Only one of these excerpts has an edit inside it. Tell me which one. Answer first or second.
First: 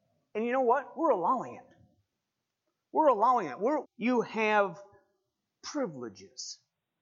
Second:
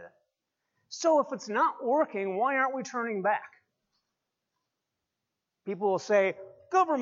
first